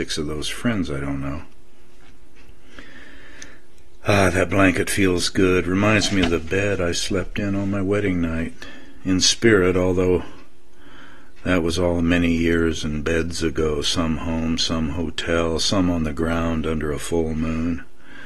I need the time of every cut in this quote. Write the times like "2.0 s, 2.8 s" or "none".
none